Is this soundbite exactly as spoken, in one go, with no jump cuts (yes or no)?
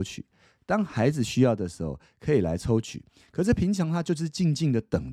yes